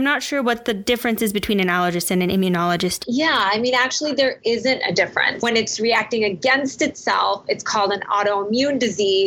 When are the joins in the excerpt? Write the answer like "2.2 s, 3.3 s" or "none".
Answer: 3.0 s, 5.4 s